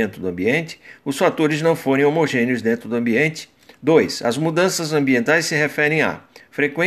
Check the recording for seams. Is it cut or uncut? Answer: uncut